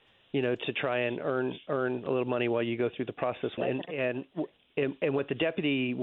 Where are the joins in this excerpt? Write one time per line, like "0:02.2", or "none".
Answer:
0:03.6